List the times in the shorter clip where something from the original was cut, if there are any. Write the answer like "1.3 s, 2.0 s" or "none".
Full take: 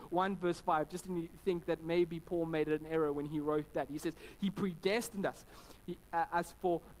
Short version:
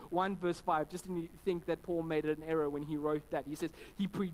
1.8 s